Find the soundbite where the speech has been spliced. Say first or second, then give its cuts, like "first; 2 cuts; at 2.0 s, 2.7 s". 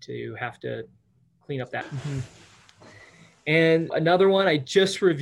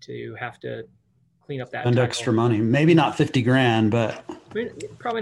first; 2 cuts; at 1.8 s, 3.9 s